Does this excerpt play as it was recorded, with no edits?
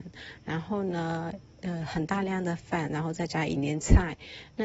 no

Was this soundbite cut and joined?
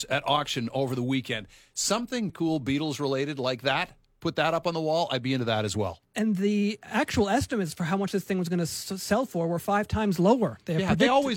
yes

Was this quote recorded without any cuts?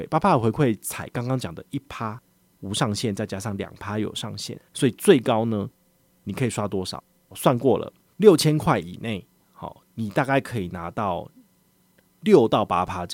no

